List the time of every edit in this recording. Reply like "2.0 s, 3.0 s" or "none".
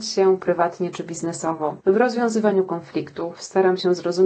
1.8 s